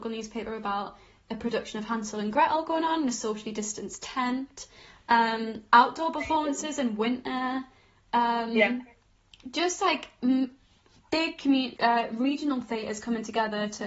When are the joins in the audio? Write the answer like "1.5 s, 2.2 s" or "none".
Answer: 11.8 s